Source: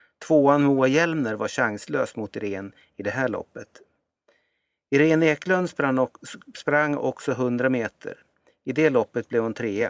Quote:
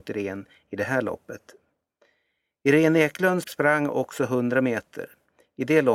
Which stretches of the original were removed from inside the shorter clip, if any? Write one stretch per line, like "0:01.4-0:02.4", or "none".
0:05.7-0:06.5